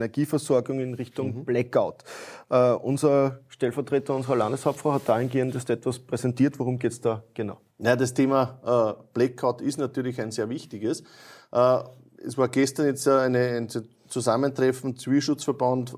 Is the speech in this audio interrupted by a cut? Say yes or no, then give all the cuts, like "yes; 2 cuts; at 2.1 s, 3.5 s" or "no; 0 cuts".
yes; 1 cut; at 7.7 s